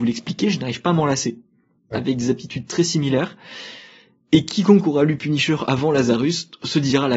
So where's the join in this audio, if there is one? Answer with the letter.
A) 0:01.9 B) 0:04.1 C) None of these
A